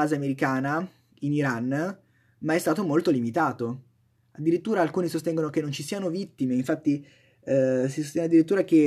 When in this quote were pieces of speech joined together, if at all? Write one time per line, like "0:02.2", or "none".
none